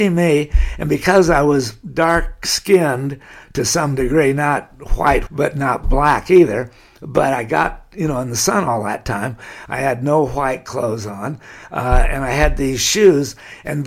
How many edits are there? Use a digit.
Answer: 2